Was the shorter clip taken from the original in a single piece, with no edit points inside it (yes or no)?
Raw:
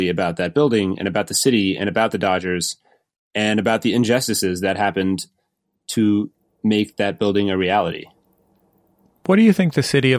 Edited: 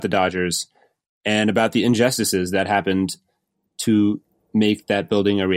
yes